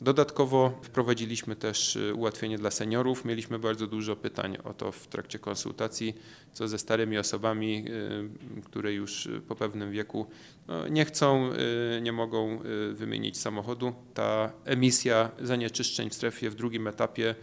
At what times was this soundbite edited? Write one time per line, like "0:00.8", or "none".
0:14.1